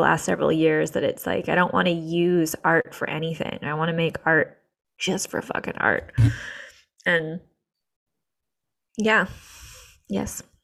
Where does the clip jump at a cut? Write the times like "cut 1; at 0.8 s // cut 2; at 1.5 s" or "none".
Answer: none